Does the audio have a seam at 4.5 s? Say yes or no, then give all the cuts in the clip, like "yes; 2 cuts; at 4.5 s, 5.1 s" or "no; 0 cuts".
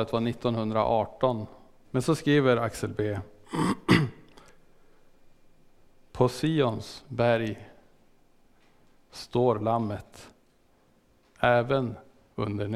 no; 1 cut; at 1.8 s